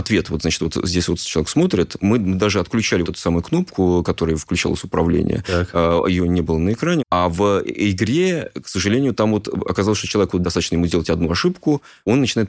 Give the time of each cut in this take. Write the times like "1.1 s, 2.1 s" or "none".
3.0 s, 7.0 s

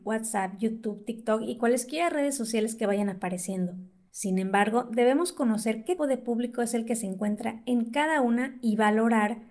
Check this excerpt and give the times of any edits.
6.0 s

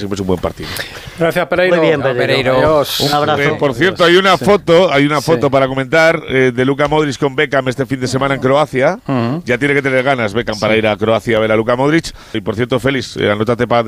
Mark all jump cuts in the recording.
12.3 s

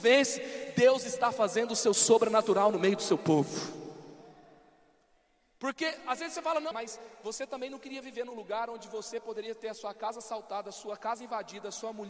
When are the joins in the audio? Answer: 6.7 s

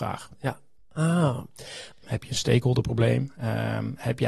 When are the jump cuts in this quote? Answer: 2.0 s

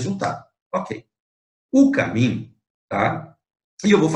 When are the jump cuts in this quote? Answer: 2.9 s

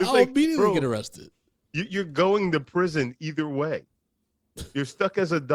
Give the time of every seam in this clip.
none

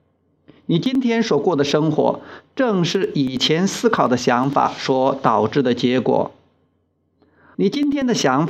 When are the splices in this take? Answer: 7.5 s

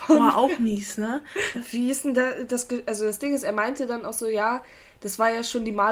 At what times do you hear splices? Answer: 1.5 s

